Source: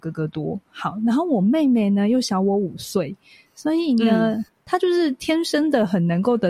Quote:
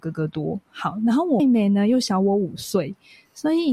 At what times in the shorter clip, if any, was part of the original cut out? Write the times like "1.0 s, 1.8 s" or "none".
1.4 s